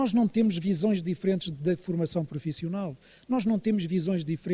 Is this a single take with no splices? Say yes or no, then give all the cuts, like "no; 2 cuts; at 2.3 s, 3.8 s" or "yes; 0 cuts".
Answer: yes; 0 cuts